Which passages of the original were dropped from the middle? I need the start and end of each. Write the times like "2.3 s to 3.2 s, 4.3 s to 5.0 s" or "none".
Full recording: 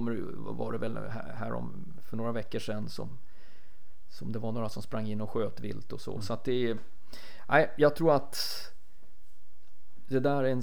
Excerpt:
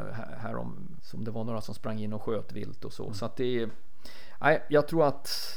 2.0 s to 4.1 s